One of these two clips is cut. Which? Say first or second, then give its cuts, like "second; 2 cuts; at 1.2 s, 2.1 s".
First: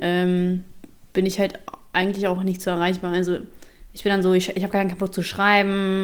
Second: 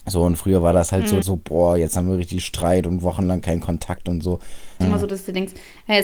second; 2 cuts; at 1.2 s, 4.8 s